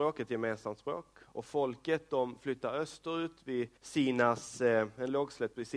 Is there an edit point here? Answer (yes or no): yes